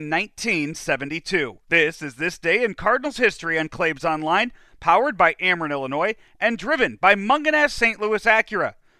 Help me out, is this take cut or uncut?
cut